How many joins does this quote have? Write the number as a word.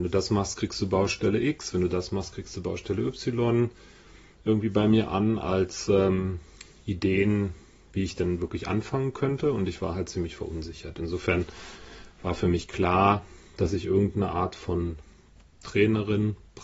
zero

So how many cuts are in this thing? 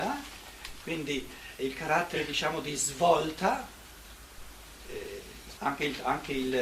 two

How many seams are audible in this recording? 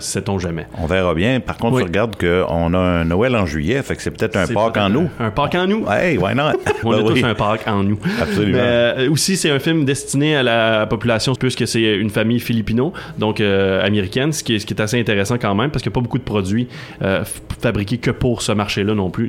two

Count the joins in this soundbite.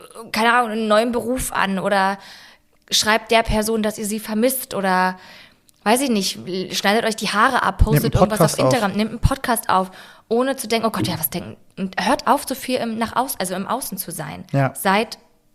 zero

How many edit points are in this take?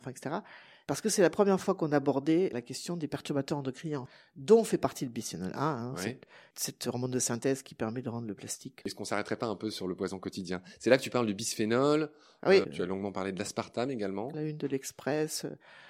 three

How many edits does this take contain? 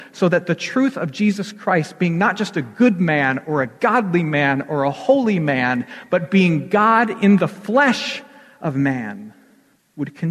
zero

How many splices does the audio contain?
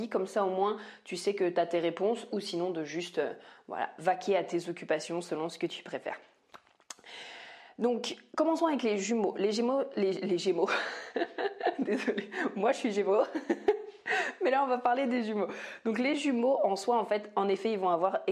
zero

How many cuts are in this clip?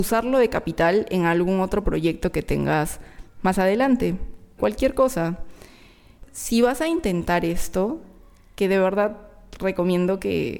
one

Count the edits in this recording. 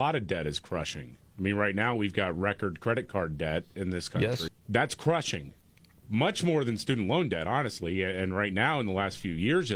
one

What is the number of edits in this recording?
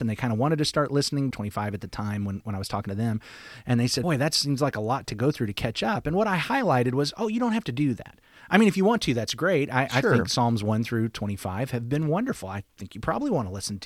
two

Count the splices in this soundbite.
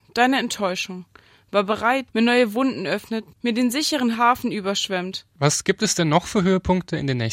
three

